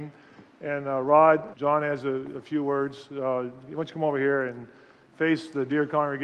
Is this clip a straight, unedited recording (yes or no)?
no